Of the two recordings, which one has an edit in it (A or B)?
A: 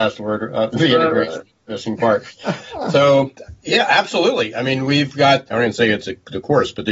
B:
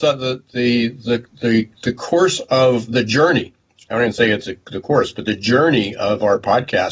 A